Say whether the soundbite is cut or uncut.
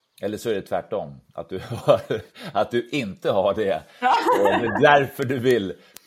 uncut